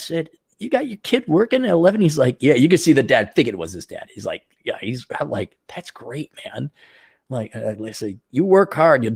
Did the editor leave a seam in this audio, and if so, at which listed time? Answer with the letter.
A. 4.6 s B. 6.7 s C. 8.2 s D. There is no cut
A